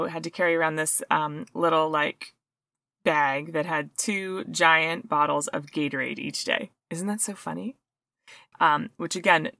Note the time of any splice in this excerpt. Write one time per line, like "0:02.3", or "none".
0:06.8
0:08.5